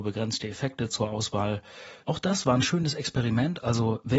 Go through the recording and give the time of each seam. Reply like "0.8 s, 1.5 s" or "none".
2.0 s